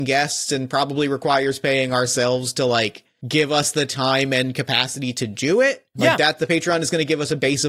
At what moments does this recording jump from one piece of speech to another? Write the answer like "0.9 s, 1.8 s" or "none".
6.0 s